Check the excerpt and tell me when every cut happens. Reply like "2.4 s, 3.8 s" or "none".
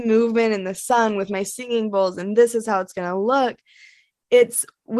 none